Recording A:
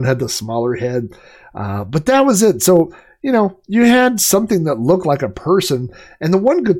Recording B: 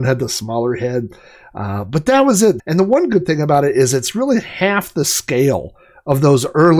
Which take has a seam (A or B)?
B